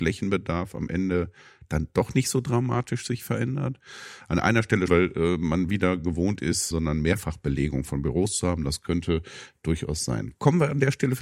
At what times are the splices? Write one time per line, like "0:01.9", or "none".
0:04.9
0:06.7